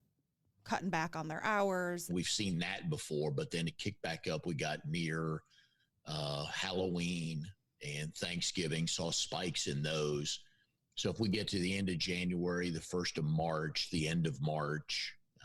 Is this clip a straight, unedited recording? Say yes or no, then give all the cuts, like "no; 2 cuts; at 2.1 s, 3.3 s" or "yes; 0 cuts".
no; 1 cut; at 2.1 s